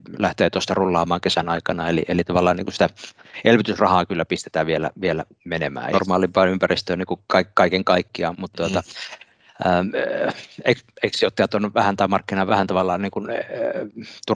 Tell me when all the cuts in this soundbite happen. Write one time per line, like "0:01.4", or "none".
0:05.9
0:08.3
0:12.5